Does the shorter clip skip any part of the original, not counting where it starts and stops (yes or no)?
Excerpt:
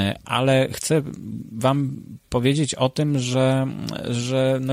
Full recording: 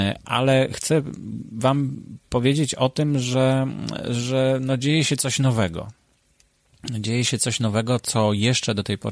no